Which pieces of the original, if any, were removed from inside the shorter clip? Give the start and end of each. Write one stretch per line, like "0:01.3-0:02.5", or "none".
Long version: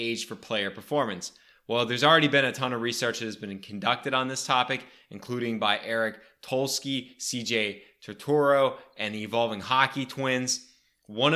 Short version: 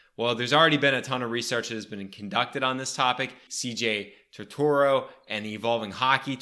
0:05.0-0:07.2